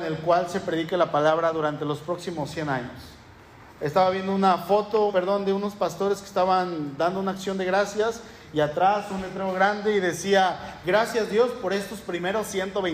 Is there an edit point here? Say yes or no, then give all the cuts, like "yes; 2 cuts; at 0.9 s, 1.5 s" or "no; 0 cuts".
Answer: yes; 1 cut; at 5.1 s